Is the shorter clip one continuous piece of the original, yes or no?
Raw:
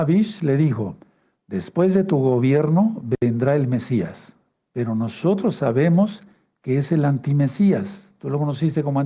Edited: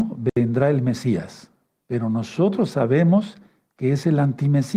yes